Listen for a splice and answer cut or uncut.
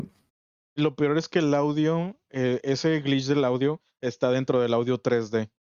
uncut